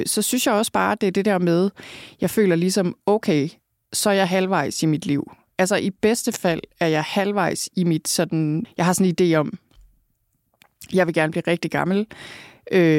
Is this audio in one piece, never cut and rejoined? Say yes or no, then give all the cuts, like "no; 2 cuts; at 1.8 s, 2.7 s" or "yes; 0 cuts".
no; 1 cut; at 8.6 s